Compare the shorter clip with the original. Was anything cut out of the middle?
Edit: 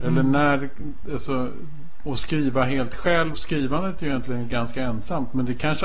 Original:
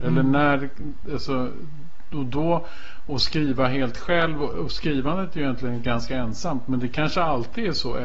yes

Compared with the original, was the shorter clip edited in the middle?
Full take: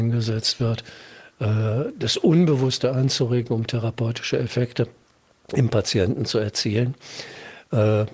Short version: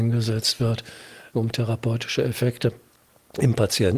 yes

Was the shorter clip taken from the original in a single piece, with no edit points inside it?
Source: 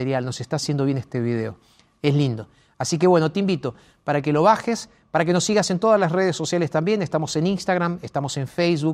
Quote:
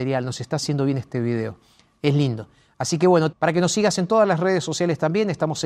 no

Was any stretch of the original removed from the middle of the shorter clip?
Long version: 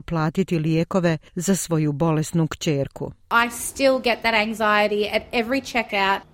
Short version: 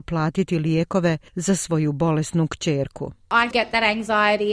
yes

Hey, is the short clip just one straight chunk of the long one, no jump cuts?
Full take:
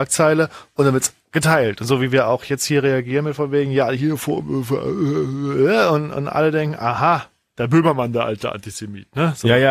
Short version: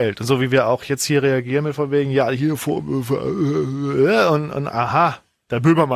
no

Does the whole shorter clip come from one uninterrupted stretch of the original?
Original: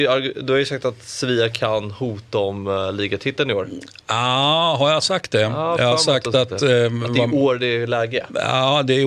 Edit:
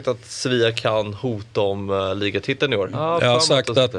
no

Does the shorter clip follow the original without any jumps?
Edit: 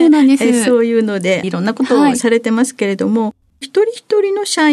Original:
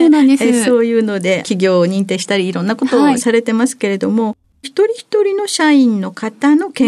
no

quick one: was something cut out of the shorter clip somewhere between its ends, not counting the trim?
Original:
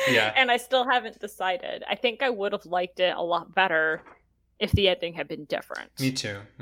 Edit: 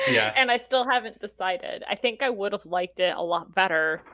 no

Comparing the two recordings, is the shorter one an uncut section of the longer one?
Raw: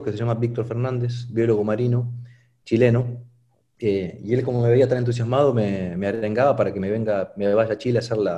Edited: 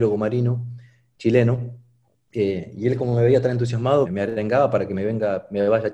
no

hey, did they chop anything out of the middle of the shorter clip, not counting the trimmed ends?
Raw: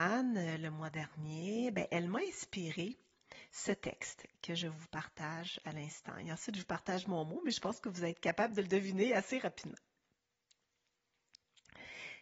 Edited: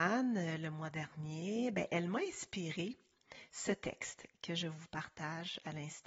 no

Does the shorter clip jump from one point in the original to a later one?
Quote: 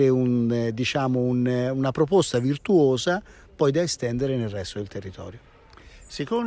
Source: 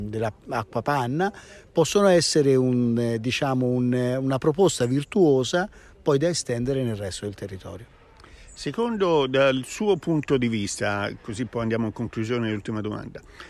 no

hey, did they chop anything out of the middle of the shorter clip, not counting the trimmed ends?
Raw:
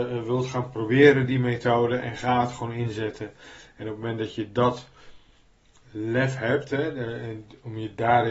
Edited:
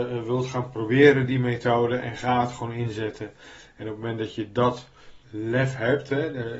yes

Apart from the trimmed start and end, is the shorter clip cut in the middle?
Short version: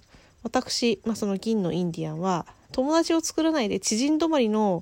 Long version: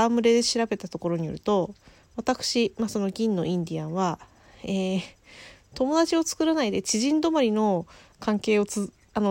yes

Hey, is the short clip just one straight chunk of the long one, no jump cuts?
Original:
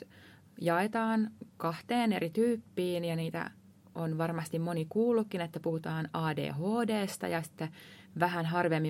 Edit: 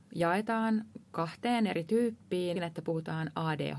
no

